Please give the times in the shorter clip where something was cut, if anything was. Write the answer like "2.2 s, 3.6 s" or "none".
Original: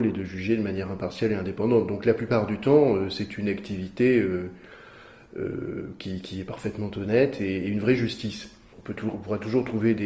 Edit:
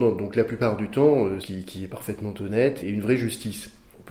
1.4 s, 2.8 s